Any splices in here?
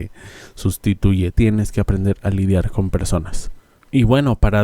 yes; 1 cut; at 1.3 s

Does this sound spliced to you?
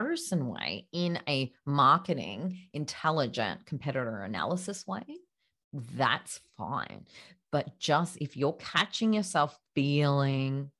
no; 0 cuts

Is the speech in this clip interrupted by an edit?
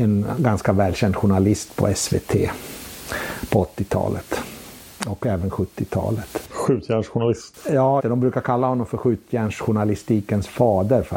yes; 1 cut; at 8.0 s

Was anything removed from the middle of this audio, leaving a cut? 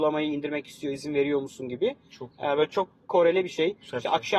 no; 0 cuts

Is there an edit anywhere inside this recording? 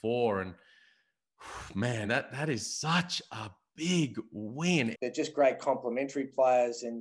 yes; 2 cuts; at 2.0 s, 4.9 s

